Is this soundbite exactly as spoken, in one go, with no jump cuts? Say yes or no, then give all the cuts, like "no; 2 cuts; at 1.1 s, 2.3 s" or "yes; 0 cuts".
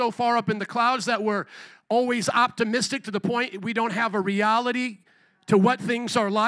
yes; 0 cuts